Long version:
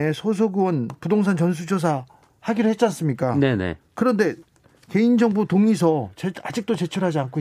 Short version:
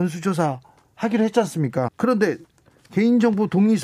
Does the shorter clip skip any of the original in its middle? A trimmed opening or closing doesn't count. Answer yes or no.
yes